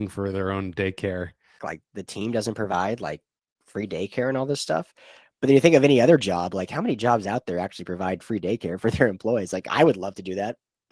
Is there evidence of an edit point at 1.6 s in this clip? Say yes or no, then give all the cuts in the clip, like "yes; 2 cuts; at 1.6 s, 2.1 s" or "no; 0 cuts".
yes; 1 cut; at 1.6 s